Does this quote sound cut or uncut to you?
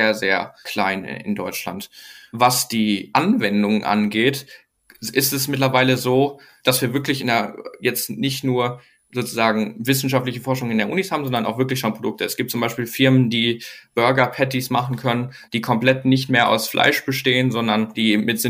uncut